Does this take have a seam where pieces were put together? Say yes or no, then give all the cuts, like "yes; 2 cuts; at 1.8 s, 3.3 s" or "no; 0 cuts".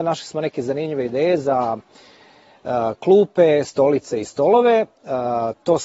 no; 0 cuts